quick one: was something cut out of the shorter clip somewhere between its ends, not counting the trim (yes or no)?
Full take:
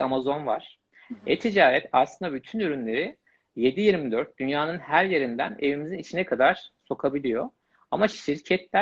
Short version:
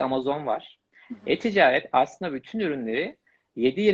no